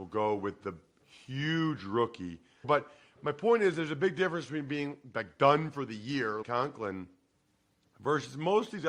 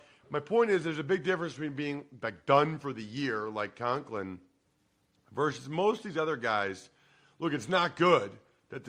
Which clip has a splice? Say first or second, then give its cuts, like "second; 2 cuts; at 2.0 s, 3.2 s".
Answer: first; 2 cuts; at 2.6 s, 6.4 s